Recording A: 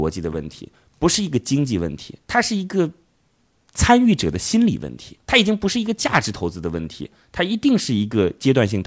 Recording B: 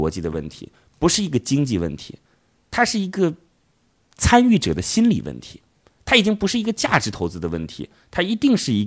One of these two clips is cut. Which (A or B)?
A